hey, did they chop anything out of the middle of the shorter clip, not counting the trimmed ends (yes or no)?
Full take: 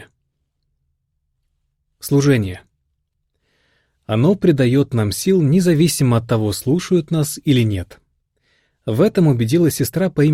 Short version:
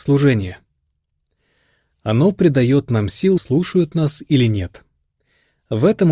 yes